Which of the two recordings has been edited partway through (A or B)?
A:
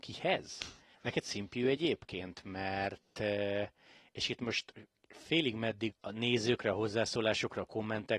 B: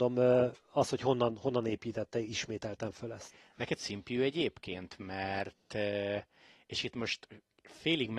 A